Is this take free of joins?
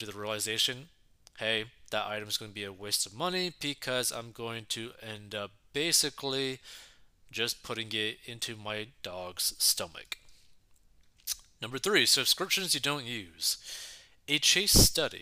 yes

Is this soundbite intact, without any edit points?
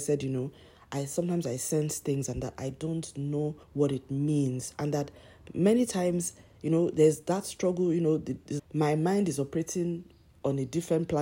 no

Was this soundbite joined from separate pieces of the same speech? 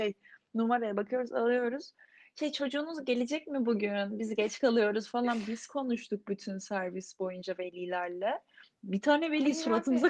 no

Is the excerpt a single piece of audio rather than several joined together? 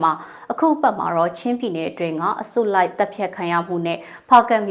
yes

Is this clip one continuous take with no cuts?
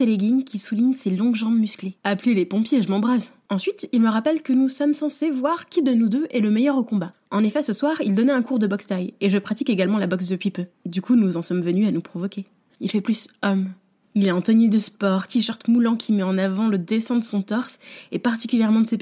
no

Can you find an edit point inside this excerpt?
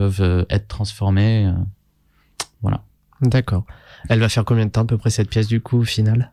no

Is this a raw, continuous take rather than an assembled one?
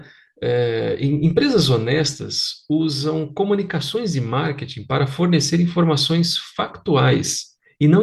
yes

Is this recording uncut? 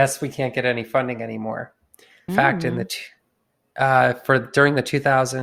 no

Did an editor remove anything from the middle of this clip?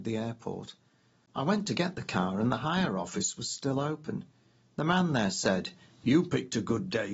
no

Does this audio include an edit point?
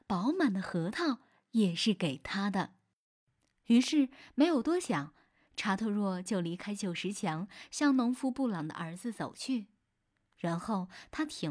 no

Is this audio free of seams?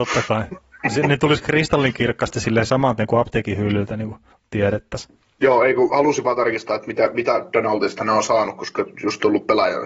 yes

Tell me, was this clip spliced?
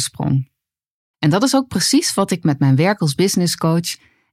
yes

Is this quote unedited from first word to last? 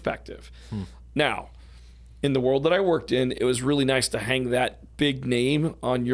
yes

